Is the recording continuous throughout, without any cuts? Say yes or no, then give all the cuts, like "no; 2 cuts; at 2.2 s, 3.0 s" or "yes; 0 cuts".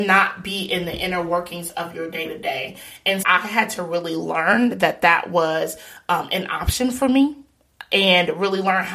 no; 1 cut; at 3.2 s